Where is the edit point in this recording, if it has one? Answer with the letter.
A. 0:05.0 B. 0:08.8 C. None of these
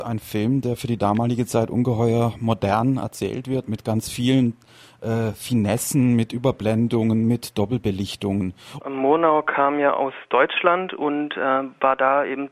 B